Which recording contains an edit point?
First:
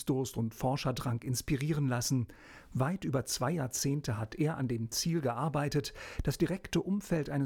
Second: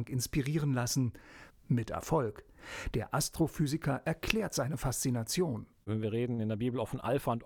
second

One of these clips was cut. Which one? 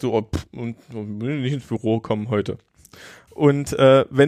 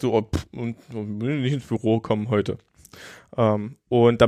first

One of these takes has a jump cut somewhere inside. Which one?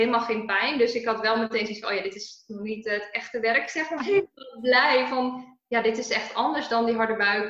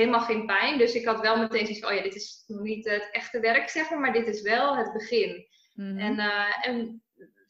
first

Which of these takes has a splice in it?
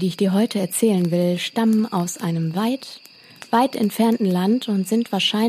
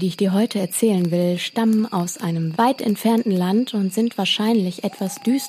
second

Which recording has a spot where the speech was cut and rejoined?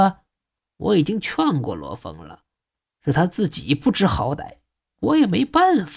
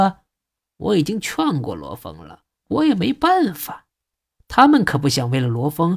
second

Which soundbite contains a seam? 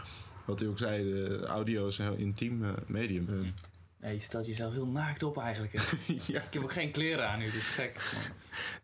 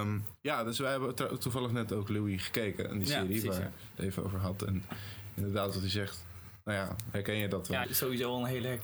second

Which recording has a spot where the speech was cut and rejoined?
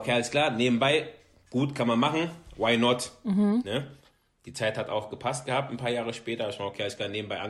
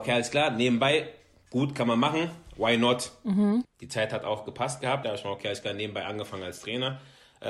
second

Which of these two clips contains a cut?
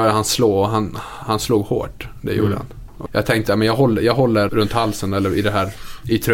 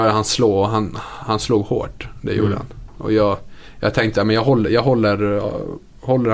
first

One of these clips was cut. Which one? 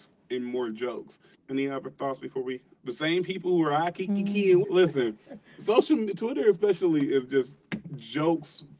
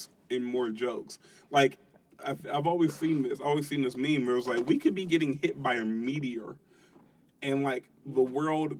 first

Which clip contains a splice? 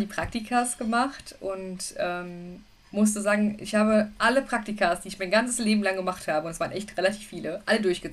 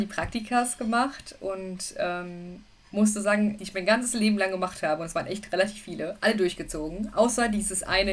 second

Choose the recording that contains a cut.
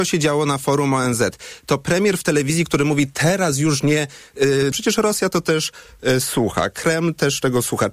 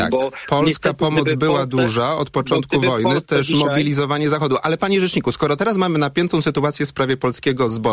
first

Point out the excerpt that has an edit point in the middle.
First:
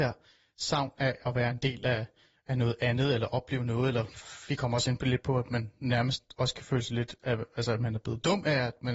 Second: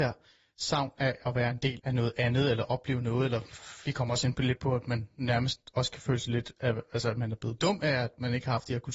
second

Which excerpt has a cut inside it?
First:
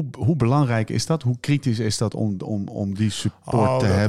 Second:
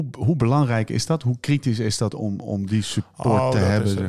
second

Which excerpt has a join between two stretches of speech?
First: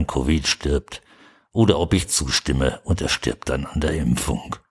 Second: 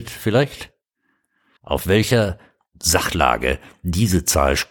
second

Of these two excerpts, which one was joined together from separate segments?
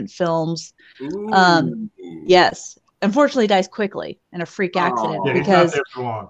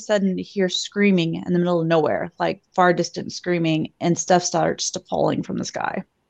first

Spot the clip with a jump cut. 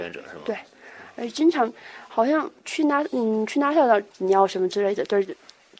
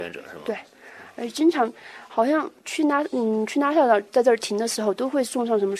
first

